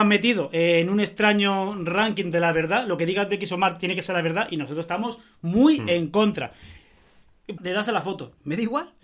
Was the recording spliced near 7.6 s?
yes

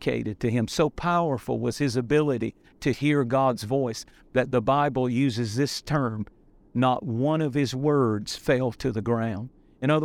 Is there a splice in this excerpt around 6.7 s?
no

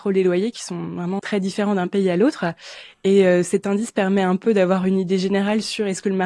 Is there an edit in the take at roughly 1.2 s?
yes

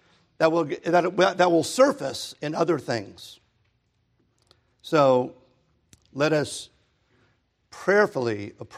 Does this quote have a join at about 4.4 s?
no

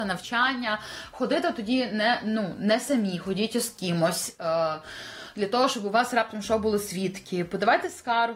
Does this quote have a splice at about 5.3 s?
no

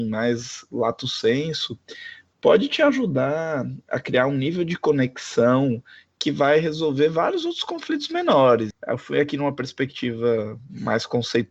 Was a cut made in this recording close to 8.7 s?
yes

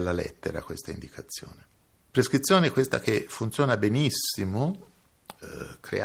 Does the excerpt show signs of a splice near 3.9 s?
no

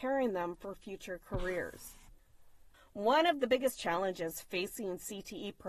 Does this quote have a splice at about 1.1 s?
no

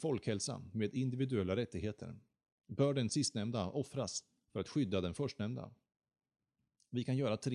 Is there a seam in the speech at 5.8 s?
no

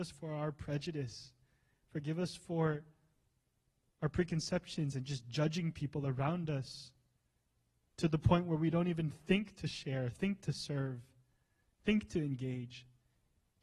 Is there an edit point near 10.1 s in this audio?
yes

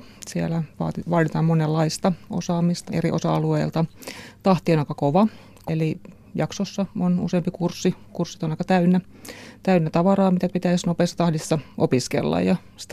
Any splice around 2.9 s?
yes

